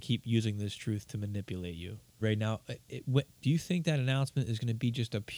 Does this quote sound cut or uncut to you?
cut